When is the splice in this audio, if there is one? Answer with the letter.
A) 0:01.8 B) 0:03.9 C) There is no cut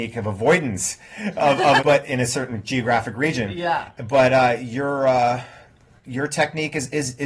A